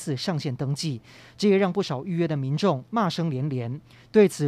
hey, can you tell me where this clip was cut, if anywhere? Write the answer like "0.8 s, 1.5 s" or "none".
none